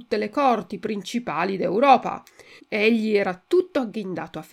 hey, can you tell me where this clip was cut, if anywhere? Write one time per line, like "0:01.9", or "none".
0:02.6